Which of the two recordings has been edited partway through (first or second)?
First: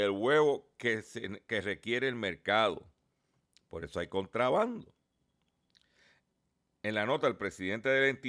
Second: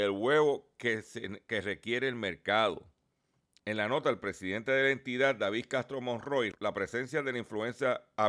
second